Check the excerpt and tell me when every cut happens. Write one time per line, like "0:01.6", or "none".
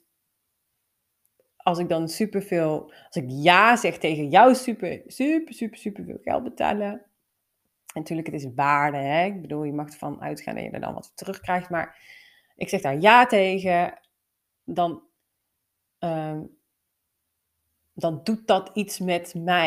none